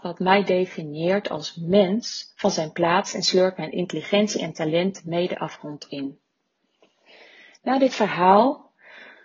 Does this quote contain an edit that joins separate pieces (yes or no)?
no